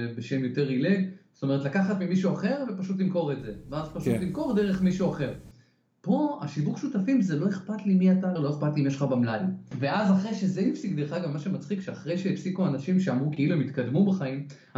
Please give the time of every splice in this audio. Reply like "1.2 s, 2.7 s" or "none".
8.4 s, 9.7 s